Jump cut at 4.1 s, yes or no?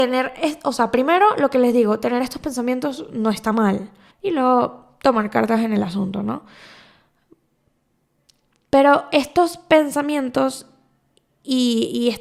yes